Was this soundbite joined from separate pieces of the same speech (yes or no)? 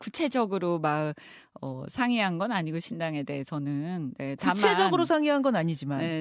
no